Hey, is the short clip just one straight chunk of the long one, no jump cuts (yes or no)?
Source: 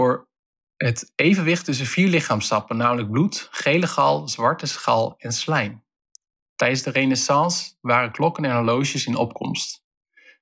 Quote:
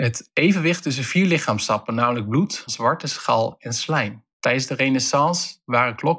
no